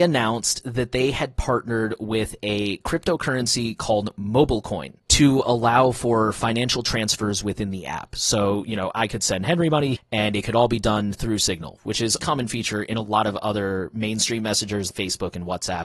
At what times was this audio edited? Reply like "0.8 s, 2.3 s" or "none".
9.9 s, 12.2 s, 14.9 s